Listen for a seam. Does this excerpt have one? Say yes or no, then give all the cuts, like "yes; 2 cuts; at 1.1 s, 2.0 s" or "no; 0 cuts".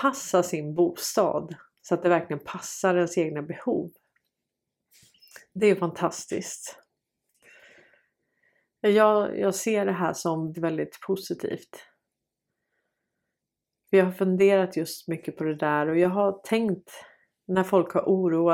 yes; 1 cut; at 10.5 s